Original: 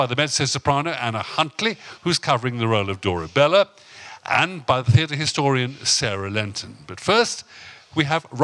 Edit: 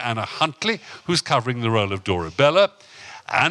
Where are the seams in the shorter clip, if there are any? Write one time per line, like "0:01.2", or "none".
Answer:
none